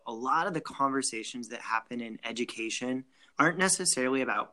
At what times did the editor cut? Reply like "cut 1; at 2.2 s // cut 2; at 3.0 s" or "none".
cut 1; at 3.3 s

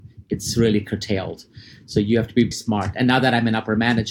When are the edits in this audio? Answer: cut 1; at 2.5 s

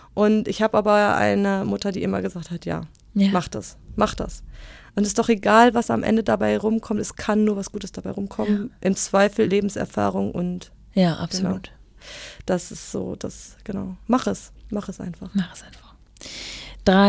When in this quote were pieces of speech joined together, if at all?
cut 1; at 9.5 s

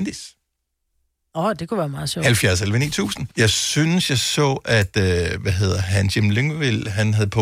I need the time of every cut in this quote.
cut 1; at 3.3 s

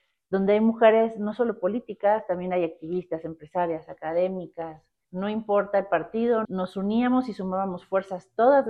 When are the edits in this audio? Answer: cut 1; at 5.0 s // cut 2; at 6.4 s

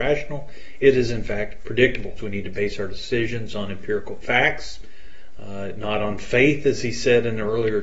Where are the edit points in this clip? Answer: cut 1; at 2.2 s

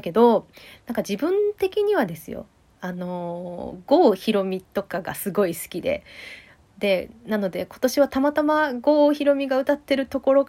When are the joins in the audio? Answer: none

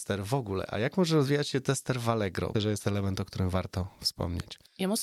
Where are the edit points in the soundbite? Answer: cut 1; at 2.5 s

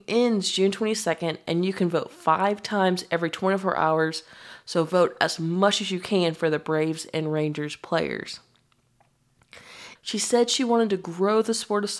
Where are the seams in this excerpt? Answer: cut 1; at 10.0 s

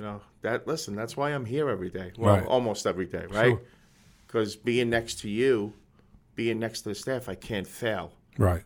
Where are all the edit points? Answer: none

